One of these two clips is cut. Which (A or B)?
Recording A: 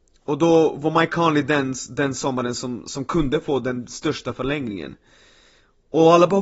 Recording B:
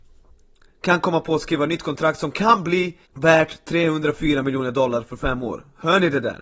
B